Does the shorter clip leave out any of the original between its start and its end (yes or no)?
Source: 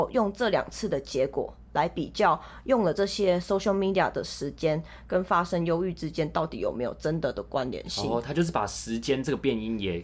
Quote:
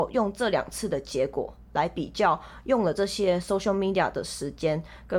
no